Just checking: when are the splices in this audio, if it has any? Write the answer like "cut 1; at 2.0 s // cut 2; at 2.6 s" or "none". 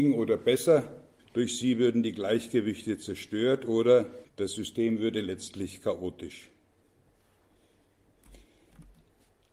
cut 1; at 1.2 s // cut 2; at 4.2 s